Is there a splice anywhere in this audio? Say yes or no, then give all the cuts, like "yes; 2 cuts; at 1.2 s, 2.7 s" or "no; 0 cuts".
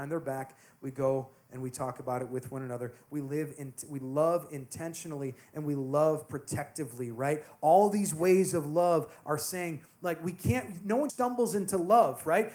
yes; 1 cut; at 11.1 s